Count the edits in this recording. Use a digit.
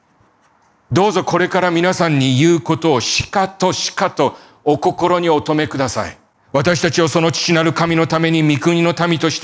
1